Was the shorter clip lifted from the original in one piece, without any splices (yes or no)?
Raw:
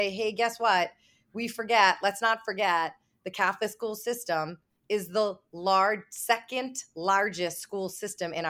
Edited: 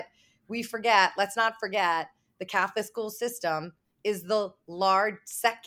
yes